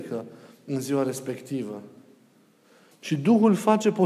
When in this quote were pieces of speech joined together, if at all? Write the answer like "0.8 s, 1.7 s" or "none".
2.9 s